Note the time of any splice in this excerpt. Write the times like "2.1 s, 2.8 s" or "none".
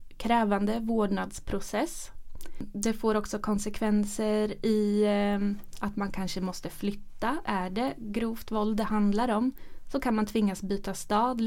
none